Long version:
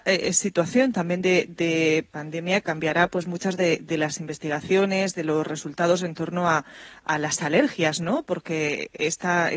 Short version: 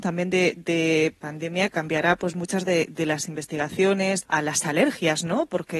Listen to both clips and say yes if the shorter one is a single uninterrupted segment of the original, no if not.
no